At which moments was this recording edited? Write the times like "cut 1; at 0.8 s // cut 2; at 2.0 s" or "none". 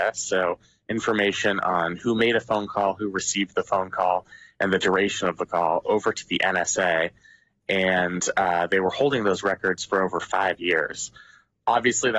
none